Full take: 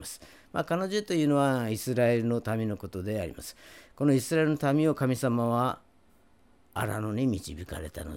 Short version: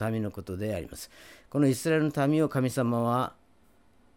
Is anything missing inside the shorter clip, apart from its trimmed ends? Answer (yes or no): no